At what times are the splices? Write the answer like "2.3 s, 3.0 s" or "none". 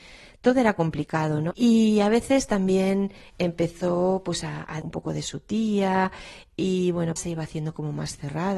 1.5 s, 4.8 s, 7.2 s